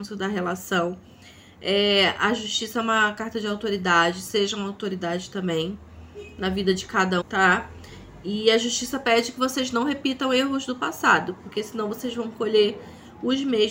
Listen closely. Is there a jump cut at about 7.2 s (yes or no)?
yes